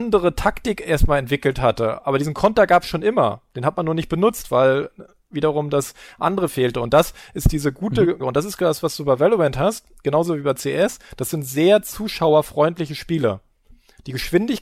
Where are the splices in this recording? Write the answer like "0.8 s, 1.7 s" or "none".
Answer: 8.2 s